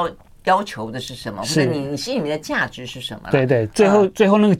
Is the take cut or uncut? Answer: uncut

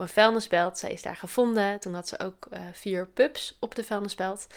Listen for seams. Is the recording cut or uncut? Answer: uncut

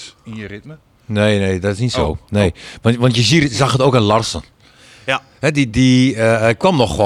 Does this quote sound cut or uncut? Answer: uncut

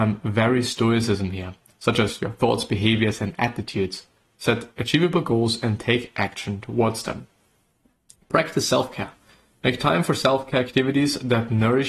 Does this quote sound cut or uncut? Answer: uncut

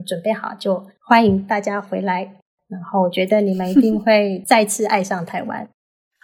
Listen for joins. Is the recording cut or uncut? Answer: uncut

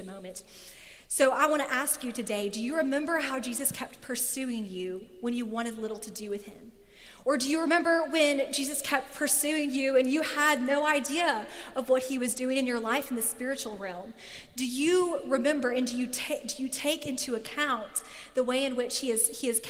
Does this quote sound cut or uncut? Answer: uncut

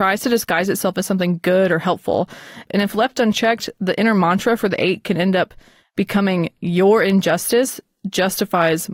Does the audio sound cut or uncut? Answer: uncut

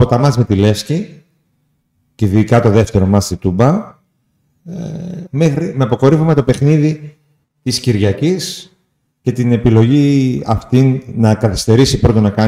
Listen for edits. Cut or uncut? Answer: cut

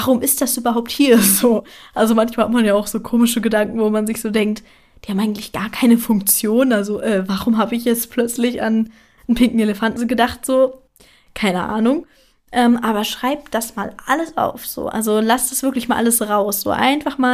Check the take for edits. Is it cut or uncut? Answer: uncut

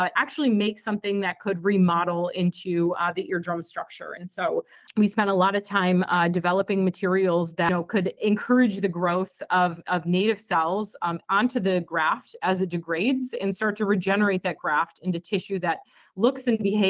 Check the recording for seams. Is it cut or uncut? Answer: uncut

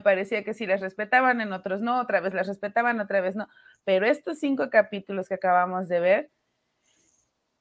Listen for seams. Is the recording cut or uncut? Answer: uncut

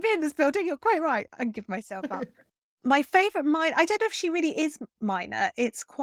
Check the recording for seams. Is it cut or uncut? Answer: uncut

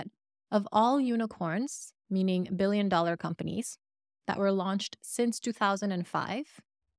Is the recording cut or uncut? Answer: uncut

